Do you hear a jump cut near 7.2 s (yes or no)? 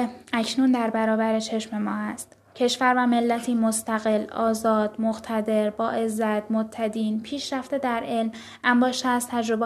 no